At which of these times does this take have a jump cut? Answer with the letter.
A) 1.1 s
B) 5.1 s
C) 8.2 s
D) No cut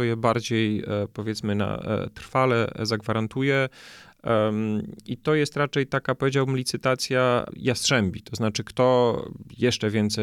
D